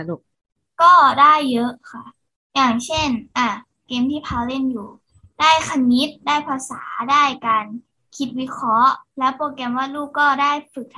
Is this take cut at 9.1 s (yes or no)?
yes